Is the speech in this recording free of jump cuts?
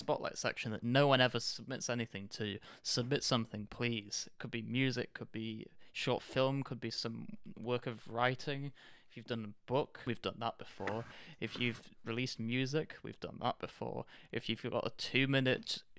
no; 1 cut; at 10.1 s

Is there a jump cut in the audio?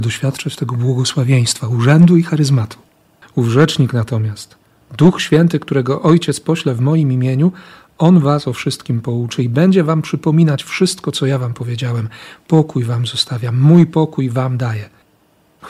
yes; 1 cut; at 3.2 s

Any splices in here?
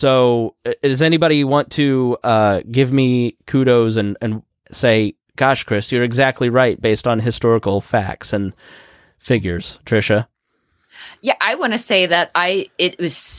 no; 0 cuts

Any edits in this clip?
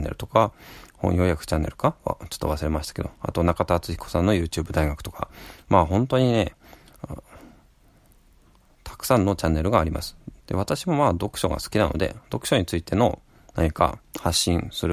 yes; 1 cut; at 10.4 s

